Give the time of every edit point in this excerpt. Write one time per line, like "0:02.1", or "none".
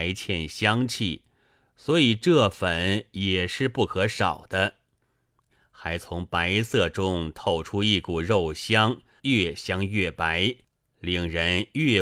0:05.5
0:09.2